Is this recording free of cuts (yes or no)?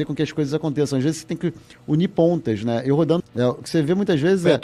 no